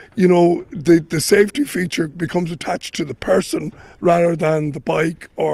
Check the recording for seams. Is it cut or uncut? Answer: uncut